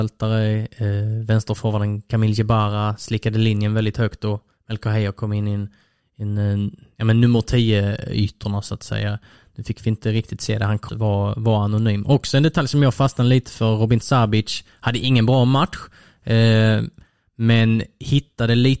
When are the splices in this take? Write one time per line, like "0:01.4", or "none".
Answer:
0:10.9